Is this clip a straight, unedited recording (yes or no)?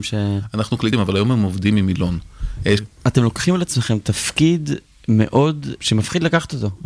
no